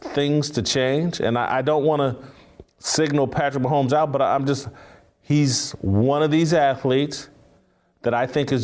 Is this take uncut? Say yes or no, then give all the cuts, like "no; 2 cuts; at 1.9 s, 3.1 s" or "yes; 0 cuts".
yes; 0 cuts